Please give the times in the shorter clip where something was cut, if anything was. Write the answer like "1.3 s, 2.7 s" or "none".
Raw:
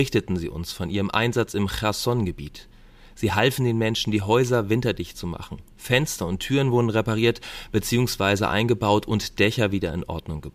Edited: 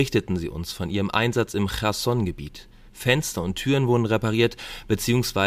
2.9 s